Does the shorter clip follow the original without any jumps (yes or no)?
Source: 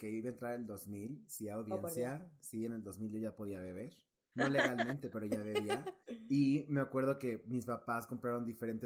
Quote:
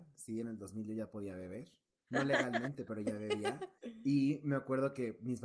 yes